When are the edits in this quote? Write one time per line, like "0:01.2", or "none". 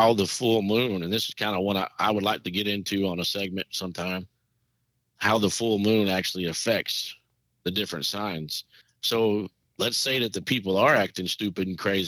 0:08.8